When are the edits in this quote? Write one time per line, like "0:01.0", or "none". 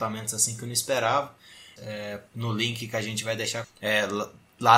0:01.8
0:03.6